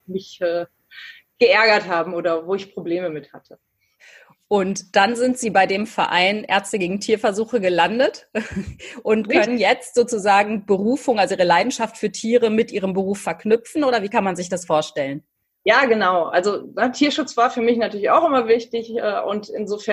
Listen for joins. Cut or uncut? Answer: uncut